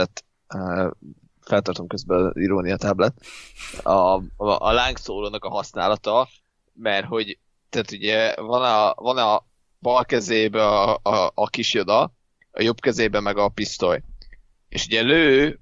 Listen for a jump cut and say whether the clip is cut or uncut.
uncut